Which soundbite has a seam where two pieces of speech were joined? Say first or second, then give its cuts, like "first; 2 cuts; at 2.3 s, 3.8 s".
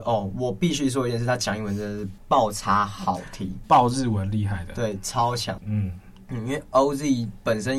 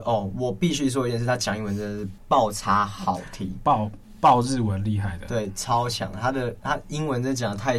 first; 2 cuts; at 3.6 s, 5.6 s